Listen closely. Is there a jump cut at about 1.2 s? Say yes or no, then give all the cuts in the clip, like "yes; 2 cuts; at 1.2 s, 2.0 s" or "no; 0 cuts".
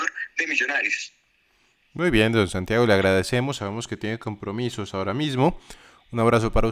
no; 0 cuts